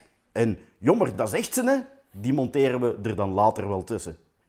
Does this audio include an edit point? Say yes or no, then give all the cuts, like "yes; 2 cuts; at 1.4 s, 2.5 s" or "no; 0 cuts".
no; 0 cuts